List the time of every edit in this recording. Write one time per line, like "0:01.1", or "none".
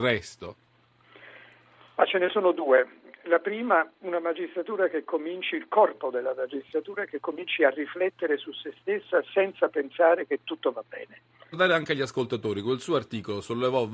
0:11.5